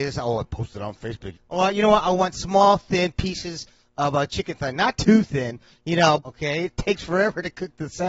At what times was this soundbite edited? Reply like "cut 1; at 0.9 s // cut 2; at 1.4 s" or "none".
cut 1; at 1.3 s // cut 2; at 6.2 s